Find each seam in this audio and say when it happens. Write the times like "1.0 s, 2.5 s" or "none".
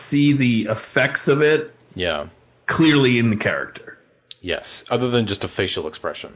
none